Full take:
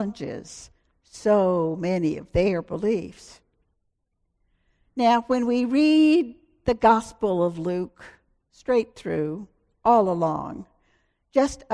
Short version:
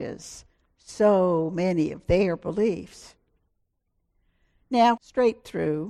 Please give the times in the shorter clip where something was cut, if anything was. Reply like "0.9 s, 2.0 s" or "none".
5.0 s

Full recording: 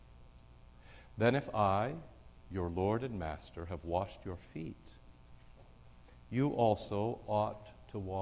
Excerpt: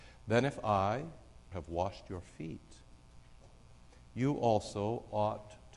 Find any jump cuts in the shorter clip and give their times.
1.5 s

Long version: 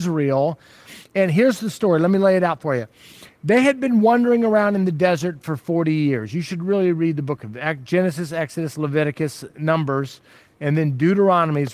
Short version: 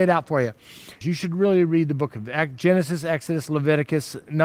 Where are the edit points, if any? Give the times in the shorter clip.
1.0 s

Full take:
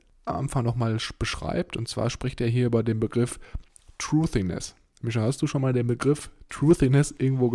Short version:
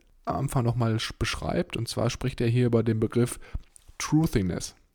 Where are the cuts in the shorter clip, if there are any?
none

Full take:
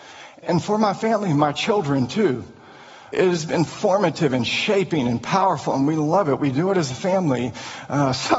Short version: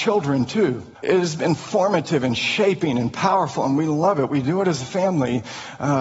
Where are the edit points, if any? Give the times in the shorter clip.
0.9 s

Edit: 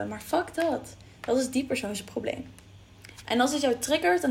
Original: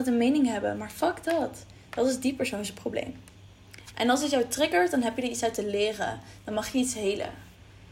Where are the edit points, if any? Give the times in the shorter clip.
none

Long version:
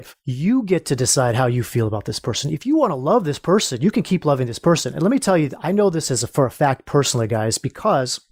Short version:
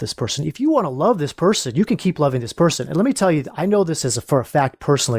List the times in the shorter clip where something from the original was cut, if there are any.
none

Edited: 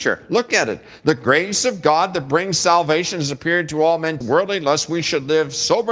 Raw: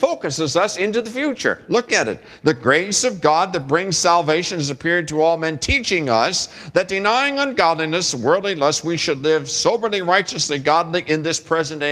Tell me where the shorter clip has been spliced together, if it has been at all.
4.2 s

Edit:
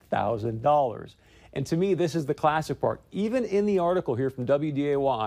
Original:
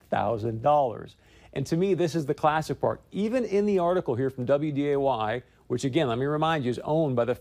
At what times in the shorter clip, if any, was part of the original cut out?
none

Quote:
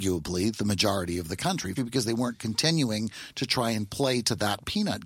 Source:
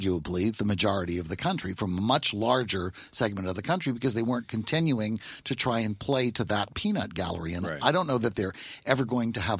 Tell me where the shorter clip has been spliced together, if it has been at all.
1.8 s

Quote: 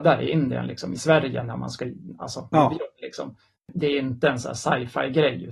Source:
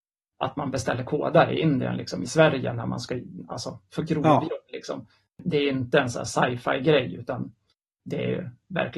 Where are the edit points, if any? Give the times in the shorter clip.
2.5 s

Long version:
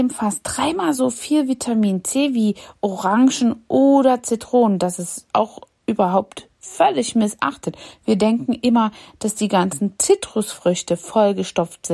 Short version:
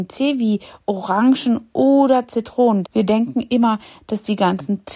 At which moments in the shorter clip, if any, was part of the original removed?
2.8 s

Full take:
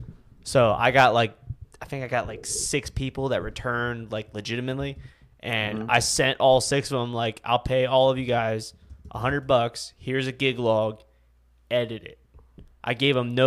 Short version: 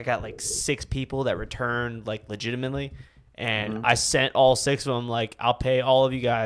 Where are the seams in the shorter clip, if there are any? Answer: none

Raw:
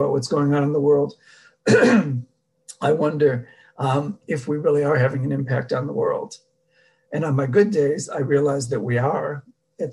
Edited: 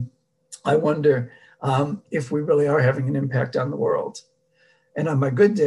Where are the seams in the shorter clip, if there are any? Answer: none

